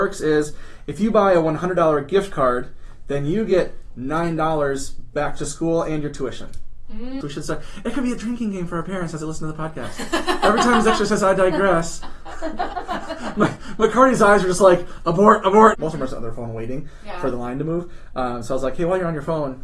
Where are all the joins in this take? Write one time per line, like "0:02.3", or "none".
0:07.2
0:15.7

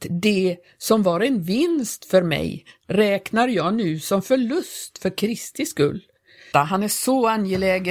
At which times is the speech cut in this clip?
0:06.5

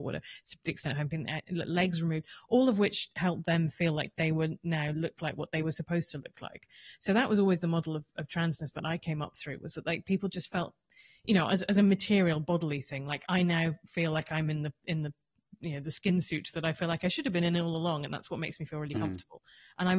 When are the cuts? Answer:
none

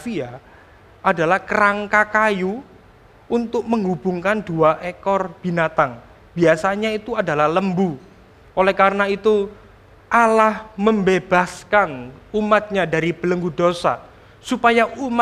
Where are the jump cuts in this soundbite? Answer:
0:08.4

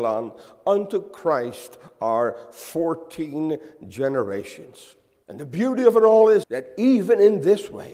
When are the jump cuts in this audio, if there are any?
0:05.2
0:06.4

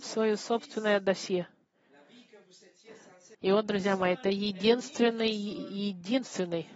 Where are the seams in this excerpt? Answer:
0:03.3

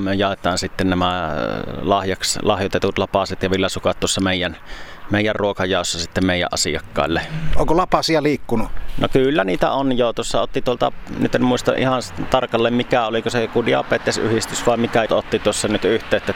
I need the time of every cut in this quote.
0:15.1

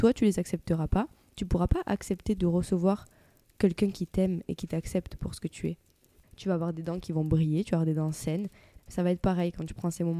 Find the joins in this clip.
0:06.2
0:08.8

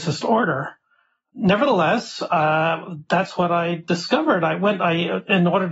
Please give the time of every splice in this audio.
none

